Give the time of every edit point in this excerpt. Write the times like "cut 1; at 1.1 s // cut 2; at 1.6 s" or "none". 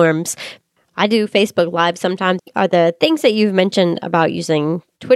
cut 1; at 2.4 s